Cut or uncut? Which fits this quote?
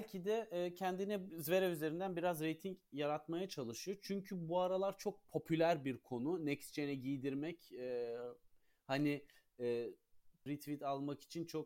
cut